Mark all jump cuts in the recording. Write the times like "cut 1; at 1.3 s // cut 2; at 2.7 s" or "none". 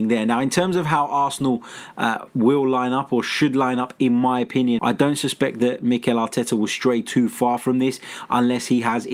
cut 1; at 4.8 s

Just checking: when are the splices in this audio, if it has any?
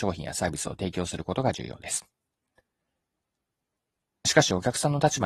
none

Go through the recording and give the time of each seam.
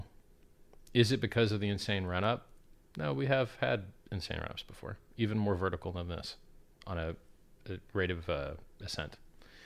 none

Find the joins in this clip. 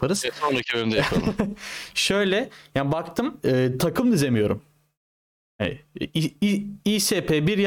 none

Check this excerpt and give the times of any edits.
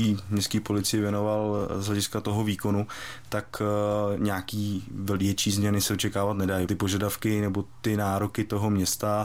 cut 1; at 6.7 s

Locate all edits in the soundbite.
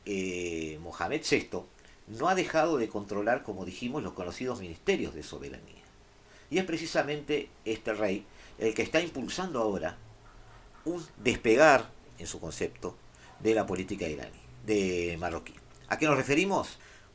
none

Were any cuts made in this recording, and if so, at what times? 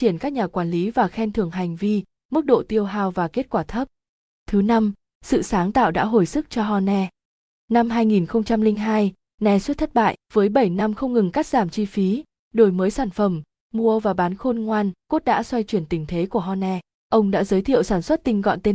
cut 1; at 10.2 s // cut 2; at 15.0 s

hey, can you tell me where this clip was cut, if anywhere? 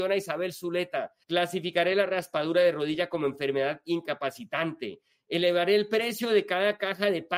cut 1; at 1.2 s

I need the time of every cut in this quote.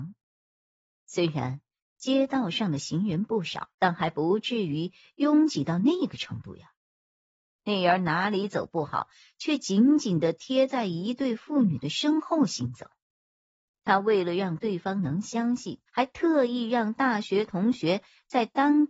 cut 1; at 3.7 s // cut 2; at 13.7 s // cut 3; at 15.9 s

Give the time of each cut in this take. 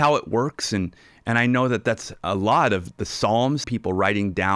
cut 1; at 3.6 s

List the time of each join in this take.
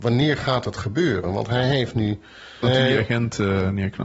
cut 1; at 2.6 s

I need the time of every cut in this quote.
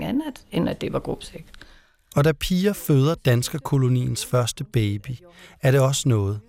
none

